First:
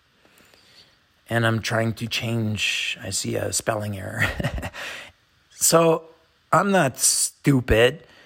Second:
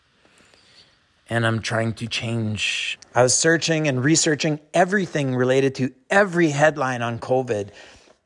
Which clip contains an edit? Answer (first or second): second